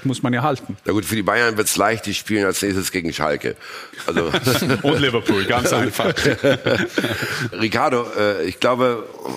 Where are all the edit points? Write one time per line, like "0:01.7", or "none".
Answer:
0:07.5